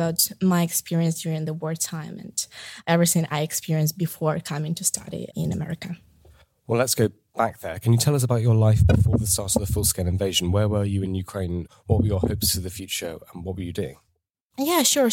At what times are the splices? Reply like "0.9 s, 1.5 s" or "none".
none